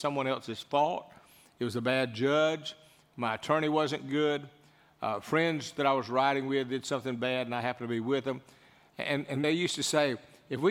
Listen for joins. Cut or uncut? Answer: uncut